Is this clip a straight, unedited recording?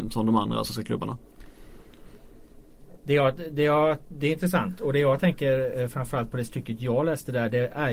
yes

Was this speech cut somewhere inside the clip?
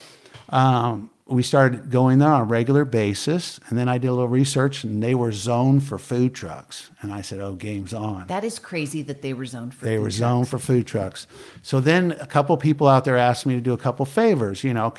no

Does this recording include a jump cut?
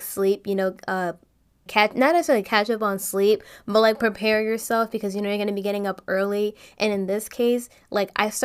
yes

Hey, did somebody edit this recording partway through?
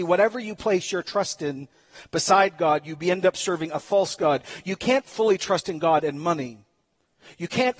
no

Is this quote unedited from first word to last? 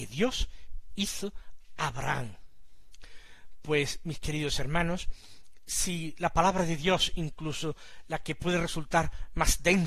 yes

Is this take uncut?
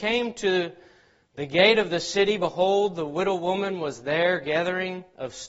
yes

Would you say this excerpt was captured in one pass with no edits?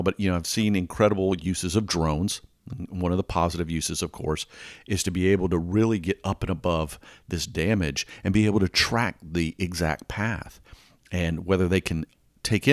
yes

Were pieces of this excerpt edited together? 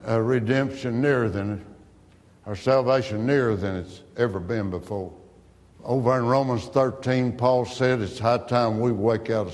yes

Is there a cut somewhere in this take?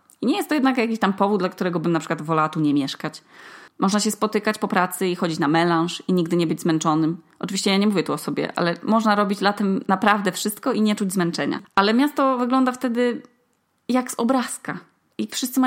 yes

